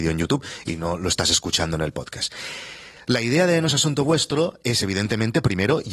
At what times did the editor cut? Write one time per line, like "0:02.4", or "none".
none